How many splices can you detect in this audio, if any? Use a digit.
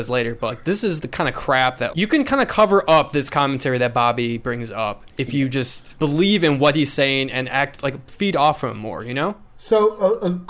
1